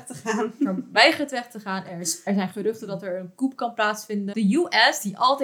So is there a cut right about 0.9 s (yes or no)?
no